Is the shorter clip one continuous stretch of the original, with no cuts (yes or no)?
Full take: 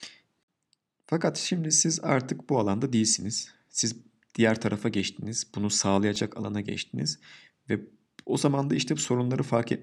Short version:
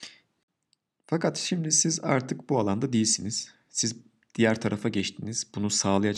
yes